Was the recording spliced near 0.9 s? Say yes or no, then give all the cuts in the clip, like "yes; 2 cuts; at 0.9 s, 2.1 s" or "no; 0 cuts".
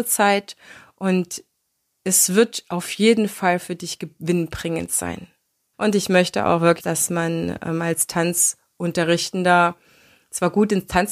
no; 2 cuts; at 5.7 s, 6.8 s